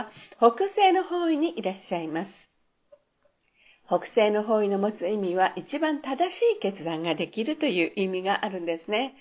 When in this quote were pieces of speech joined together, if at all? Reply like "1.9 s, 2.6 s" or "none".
none